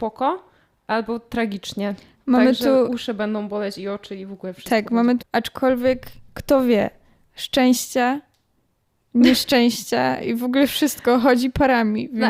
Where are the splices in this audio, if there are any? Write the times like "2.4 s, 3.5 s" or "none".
5.2 s